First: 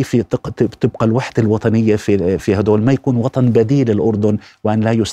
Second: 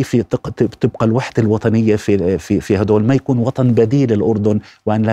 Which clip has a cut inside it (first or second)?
first